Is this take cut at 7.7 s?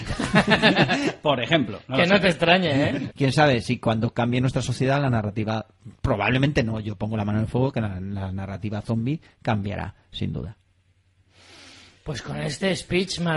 no; 1 cut; at 3.1 s

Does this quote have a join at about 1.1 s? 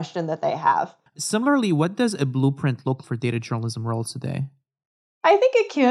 yes; 2 cuts; at 1.1 s, 3.0 s

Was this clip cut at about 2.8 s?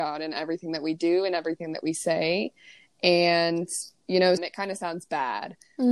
no; 1 cut; at 4.4 s

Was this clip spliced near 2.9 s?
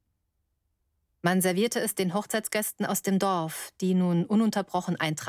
no; 1 cut; at 1.1 s

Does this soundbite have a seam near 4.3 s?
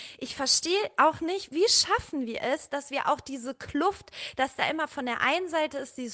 no; 1 cut; at 1.5 s

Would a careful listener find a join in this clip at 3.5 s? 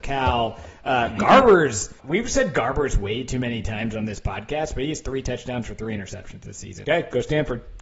no; 2 cuts; at 2.0 s, 6.8 s

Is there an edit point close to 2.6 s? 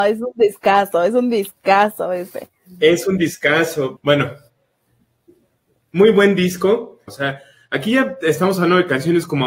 no; 2 cuts; at 4.0 s, 7.1 s

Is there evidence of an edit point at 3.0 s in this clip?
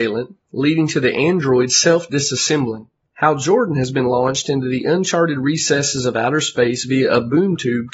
yes; 1 cut; at 3.0 s

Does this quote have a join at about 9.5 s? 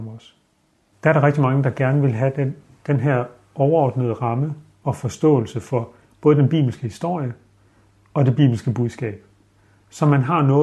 no; 1 cut; at 0.9 s

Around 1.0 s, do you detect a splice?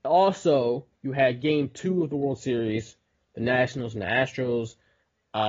yes; 1 cut; at 1.0 s

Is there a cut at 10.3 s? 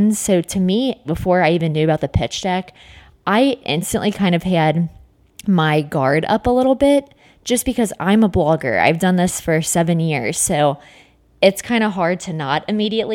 no; 1 cut; at 1.0 s

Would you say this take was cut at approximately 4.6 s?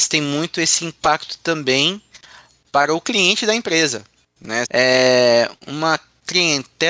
yes; 1 cut; at 4.6 s

